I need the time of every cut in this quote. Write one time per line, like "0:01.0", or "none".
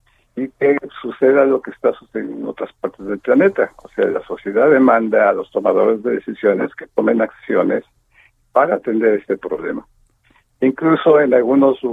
none